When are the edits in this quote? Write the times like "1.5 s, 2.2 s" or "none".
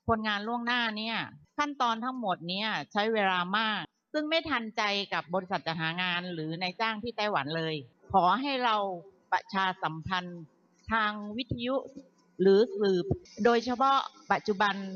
none